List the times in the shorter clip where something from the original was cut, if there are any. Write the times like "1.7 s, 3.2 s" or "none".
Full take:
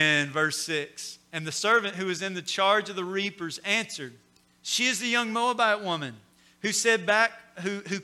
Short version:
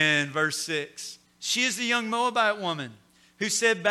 1.3 s